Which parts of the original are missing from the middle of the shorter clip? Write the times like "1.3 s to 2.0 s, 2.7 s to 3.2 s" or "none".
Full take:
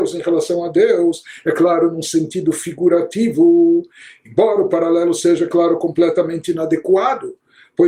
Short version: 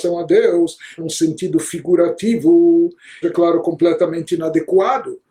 1.4 s to 1.9 s, 4.1 s to 5.4 s